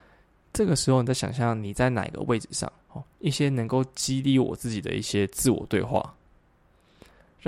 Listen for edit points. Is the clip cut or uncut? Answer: cut